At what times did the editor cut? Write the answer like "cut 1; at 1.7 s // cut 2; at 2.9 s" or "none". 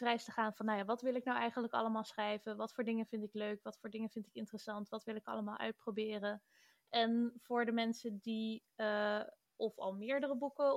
cut 1; at 9.5 s